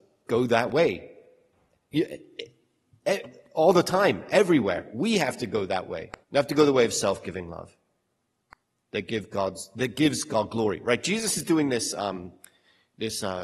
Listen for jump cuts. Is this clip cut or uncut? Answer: cut